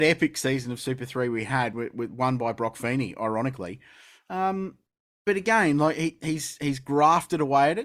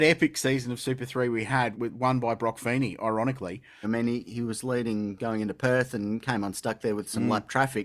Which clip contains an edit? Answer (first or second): second